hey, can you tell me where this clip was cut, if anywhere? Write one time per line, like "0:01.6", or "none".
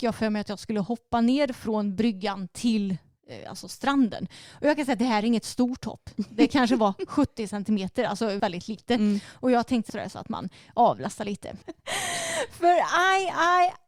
0:08.4
0:09.9
0:11.6